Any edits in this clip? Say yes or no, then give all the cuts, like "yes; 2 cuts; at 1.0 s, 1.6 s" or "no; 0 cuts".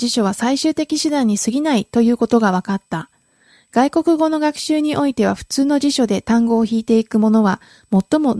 no; 0 cuts